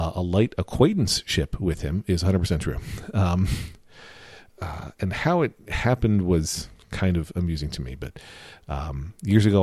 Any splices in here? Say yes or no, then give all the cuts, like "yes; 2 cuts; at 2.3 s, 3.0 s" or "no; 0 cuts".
no; 0 cuts